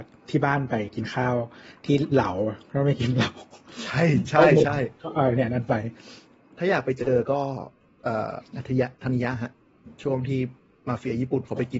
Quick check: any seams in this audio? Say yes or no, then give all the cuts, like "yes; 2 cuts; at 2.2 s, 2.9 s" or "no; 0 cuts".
yes; 1 cut; at 8.4 s